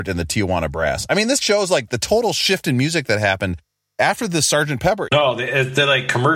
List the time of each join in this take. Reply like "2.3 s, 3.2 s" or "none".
1.4 s, 5.1 s